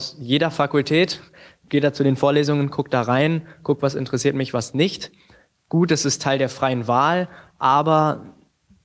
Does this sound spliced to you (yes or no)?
no